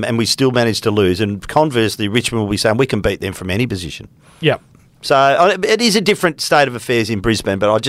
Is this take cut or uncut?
uncut